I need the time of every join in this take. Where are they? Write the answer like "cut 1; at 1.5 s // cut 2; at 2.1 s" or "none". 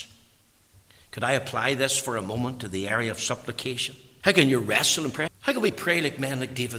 cut 1; at 4.2 s // cut 2; at 5.3 s